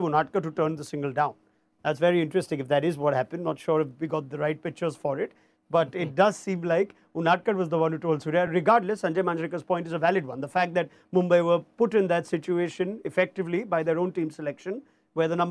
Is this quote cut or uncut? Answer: uncut